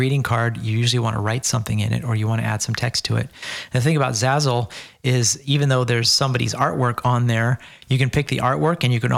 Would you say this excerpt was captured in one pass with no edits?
yes; 0 cuts

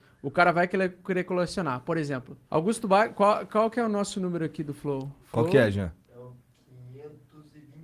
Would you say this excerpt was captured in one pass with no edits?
no; 1 cut; at 2.4 s

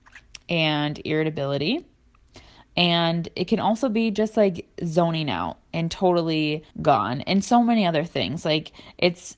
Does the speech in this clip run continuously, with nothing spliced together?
no; 2 cuts; at 2.6 s, 6.7 s

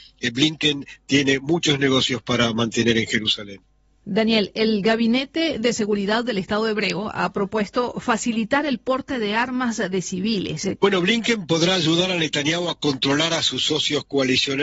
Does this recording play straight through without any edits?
no; 1 cut; at 10.8 s

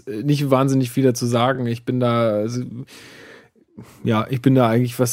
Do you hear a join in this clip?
no; 0 cuts

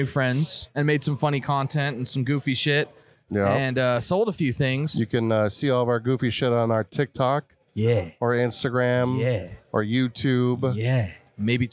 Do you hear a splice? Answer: no; 0 cuts

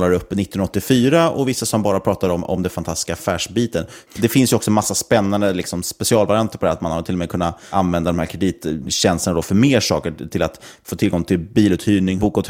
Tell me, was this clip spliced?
yes; 1 cut; at 4.1 s

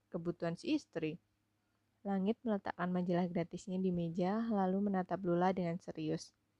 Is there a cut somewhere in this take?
yes; 1 cut; at 1.9 s

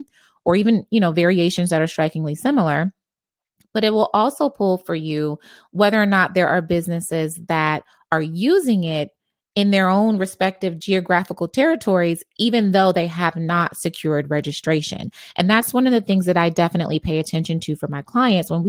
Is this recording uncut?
yes; 0 cuts

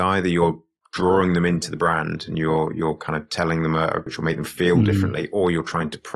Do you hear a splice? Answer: yes; 1 cut; at 4.1 s

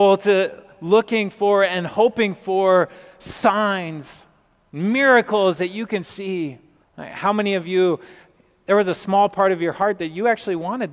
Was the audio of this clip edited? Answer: yes; 1 cut; at 6.8 s

